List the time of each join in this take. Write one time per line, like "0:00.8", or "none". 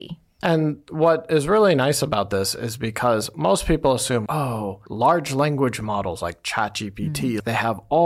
0:04.3